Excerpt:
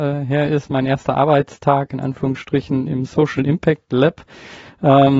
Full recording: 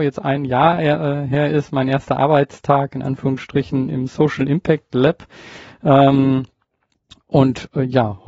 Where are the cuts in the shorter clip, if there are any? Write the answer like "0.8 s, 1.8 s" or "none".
none